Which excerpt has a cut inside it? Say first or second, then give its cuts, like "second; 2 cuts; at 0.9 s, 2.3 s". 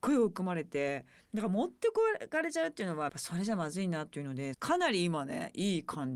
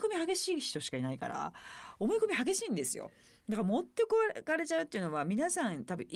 first; 3 cuts; at 1.2 s, 3.1 s, 4.5 s